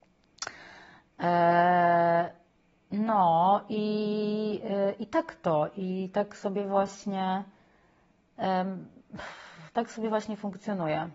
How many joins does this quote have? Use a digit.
0